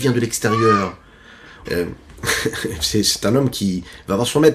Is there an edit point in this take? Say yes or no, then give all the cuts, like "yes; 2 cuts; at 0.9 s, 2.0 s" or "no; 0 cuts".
yes; 1 cut; at 1.6 s